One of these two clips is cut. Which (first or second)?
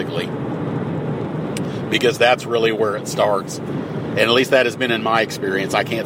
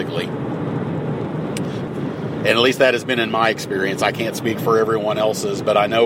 second